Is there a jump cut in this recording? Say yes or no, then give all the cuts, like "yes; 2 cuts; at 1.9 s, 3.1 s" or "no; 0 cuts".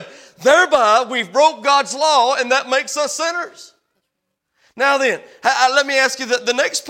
no; 0 cuts